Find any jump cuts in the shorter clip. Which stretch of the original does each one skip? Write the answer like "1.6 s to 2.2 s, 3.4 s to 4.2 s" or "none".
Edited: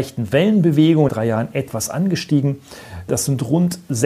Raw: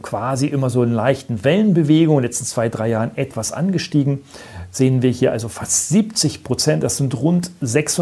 2.2 s to 2.7 s, 4.7 s to 6.8 s